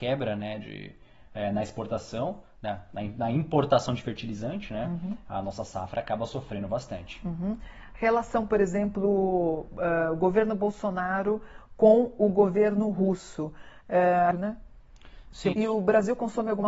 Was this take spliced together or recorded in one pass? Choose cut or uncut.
cut